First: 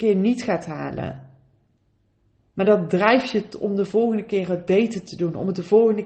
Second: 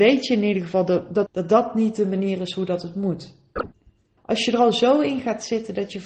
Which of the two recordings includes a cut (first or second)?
second